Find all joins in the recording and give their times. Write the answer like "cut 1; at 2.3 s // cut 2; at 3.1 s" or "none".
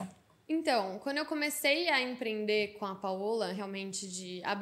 none